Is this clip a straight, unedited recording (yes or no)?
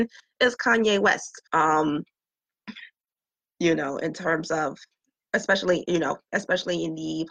no